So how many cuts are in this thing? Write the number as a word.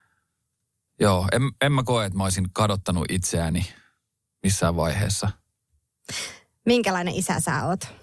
zero